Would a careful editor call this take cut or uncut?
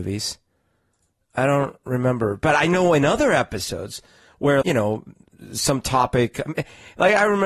cut